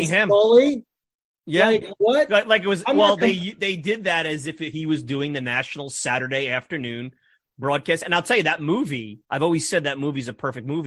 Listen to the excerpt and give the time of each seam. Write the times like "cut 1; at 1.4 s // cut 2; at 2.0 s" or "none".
cut 1; at 9.2 s